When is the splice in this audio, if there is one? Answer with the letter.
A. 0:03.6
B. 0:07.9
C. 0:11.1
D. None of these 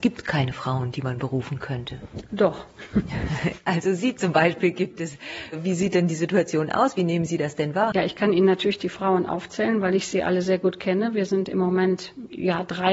B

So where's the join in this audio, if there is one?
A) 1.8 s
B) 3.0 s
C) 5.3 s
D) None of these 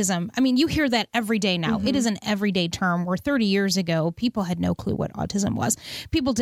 D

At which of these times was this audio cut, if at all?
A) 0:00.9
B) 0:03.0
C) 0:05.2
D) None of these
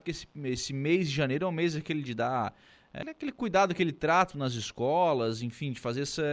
B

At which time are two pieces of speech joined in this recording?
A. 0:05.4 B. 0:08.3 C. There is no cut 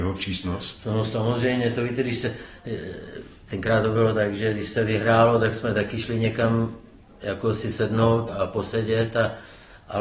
B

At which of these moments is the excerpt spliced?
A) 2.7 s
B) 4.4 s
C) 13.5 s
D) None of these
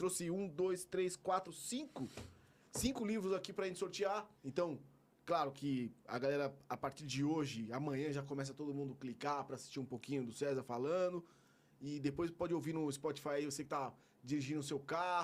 B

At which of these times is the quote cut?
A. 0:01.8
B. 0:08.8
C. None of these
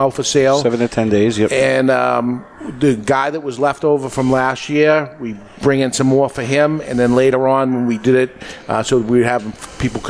C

